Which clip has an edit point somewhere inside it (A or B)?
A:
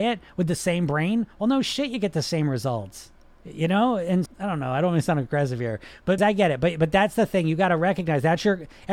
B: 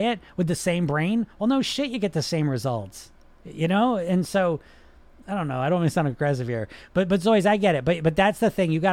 A